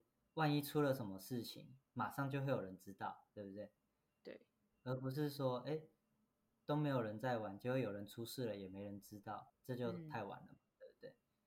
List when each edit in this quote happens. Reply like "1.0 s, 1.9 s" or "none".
9.5 s